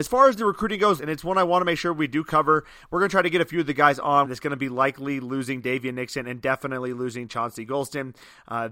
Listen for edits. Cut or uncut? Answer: cut